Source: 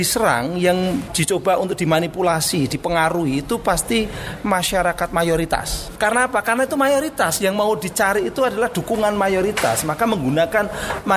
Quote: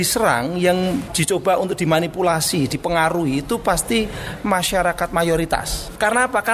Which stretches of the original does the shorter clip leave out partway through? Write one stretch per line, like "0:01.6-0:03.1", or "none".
none